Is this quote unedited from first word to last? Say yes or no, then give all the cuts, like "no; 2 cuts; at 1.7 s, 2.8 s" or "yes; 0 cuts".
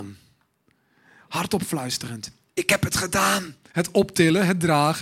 no; 1 cut; at 3.7 s